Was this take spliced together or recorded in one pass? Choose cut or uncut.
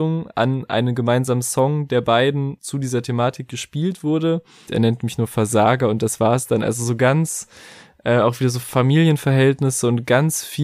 cut